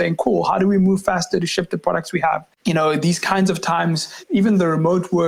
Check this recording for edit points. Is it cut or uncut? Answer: cut